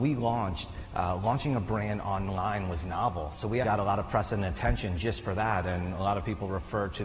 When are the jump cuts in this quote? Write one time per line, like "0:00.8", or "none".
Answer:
0:03.6